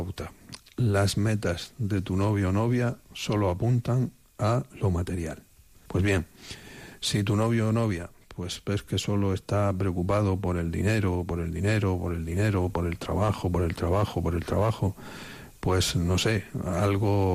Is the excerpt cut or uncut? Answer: cut